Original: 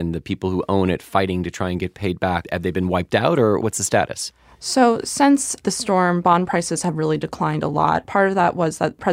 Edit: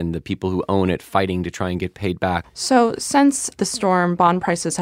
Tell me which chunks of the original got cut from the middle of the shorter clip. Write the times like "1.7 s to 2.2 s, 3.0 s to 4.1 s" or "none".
2.4 s to 4.5 s